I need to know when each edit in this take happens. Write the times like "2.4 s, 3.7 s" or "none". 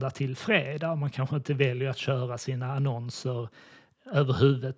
none